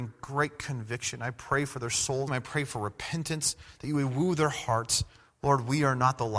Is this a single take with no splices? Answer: no; 3 cuts; at 2.3 s, 3.8 s, 5.3 s

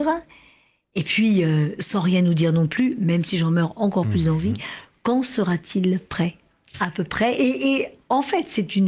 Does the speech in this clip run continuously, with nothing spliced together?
yes; 0 cuts

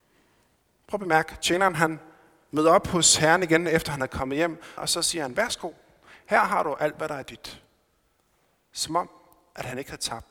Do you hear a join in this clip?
yes; 1 cut; at 4.8 s

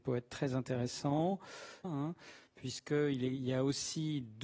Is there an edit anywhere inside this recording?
yes; 1 cut; at 1.8 s

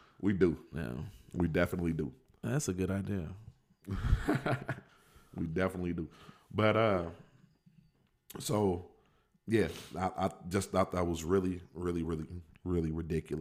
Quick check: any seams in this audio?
no; 0 cuts

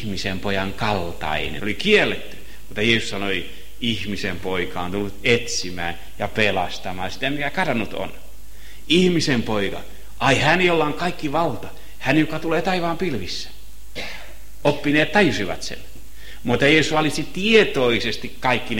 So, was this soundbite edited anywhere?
yes; 1 cut; at 1.6 s

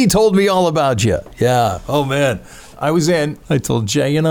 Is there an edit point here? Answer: yes; 1 cut; at 2.7 s

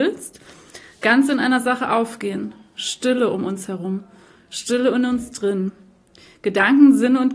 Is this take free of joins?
yes; 0 cuts

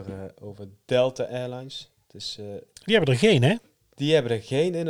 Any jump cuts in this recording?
no; 0 cuts

